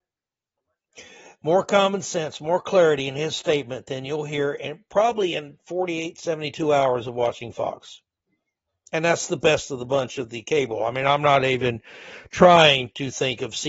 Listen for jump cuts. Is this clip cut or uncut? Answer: uncut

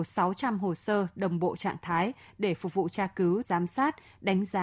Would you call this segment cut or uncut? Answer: cut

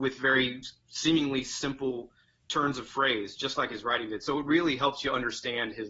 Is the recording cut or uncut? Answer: uncut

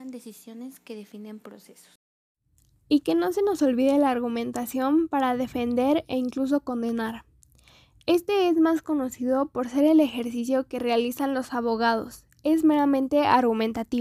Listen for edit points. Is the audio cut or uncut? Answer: uncut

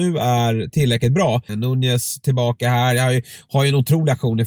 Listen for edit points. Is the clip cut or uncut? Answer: cut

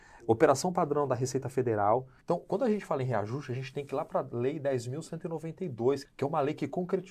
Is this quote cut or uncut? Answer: cut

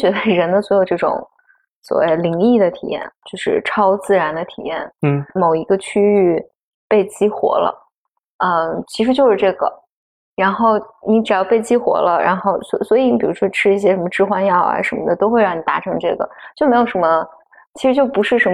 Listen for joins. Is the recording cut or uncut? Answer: cut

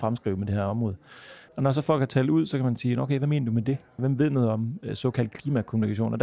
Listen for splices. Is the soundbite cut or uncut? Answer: cut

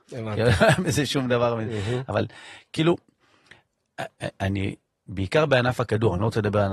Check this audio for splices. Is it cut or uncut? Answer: uncut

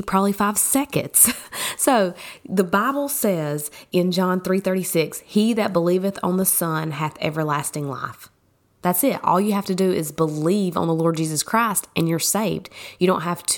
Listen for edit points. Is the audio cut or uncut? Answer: uncut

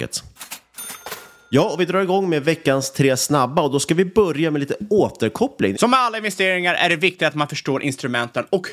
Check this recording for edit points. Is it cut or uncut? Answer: cut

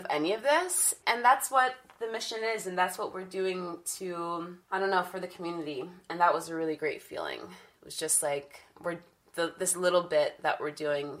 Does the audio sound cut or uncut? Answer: cut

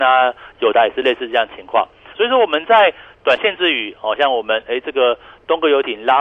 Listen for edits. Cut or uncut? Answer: cut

